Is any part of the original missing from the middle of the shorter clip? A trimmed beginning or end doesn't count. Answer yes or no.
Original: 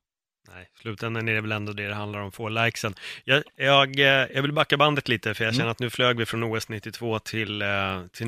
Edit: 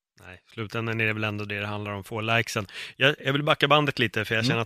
yes